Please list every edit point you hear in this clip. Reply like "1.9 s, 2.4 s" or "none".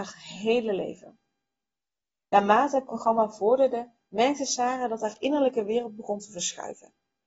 2.2 s